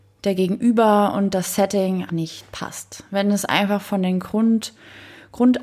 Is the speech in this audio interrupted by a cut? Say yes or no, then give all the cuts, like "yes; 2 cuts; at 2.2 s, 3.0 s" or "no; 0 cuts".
yes; 1 cut; at 2.1 s